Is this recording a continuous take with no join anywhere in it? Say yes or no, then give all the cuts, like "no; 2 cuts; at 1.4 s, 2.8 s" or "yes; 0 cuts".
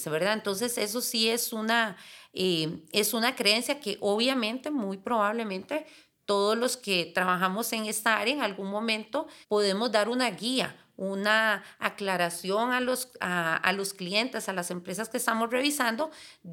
no; 1 cut; at 9.4 s